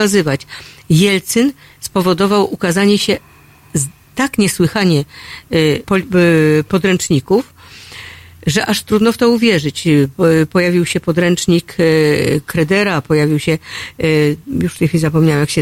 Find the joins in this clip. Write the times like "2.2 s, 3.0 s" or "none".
5.8 s